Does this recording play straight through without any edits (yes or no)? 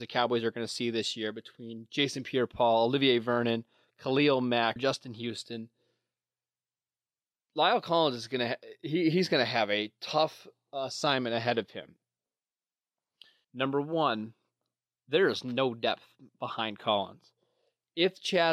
no